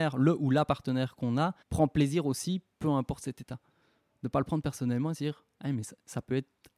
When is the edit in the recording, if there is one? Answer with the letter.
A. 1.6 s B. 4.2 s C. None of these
A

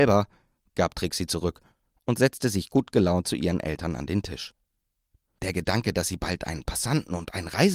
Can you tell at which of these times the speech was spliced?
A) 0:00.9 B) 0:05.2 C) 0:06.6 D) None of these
B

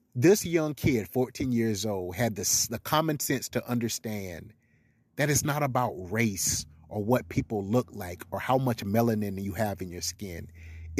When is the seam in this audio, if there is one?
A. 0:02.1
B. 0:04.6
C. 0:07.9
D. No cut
D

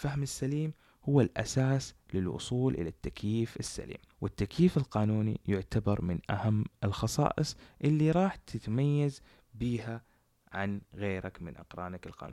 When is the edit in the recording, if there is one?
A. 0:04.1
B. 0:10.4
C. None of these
A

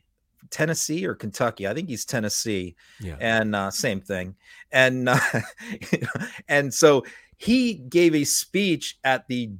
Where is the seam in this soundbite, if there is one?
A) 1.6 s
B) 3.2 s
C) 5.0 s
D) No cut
D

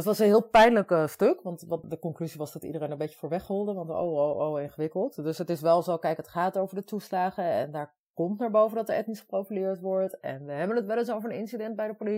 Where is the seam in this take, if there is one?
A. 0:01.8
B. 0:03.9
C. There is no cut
A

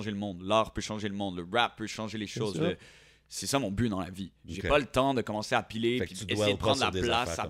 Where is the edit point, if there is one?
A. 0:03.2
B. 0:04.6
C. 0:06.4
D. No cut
D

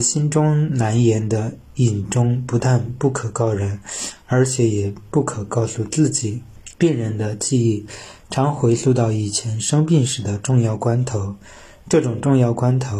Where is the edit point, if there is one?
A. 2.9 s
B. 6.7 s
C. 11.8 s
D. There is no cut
B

